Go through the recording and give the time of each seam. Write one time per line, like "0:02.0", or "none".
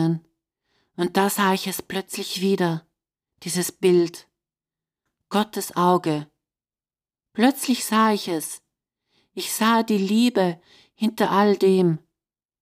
none